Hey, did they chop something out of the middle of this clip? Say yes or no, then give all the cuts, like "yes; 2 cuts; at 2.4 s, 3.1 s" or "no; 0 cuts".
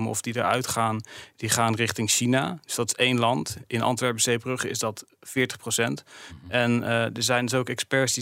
no; 0 cuts